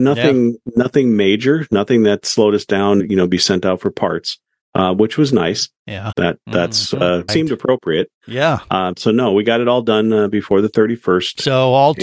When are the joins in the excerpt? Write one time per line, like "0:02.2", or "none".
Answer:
0:03.0
0:06.1
0:07.3